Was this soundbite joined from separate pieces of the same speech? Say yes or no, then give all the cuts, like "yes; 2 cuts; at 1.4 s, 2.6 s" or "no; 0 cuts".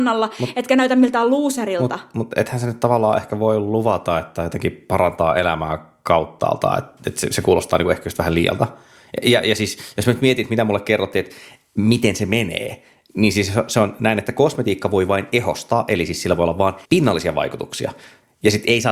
yes; 1 cut; at 16.8 s